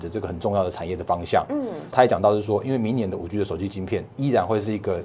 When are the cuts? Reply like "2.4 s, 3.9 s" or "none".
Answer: 1.9 s